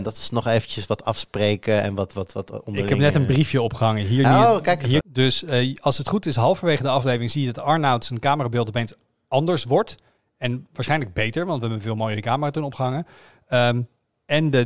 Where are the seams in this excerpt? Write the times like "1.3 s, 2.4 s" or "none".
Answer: 5.0 s